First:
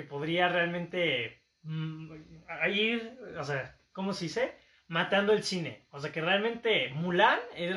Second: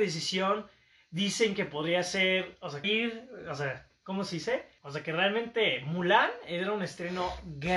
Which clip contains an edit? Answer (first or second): second